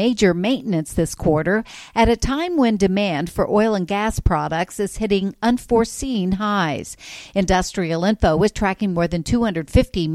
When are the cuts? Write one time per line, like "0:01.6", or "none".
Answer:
none